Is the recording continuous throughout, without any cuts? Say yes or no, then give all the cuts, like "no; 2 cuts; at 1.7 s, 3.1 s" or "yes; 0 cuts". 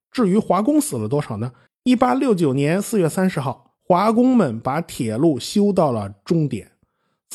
no; 2 cuts; at 1.7 s, 3.7 s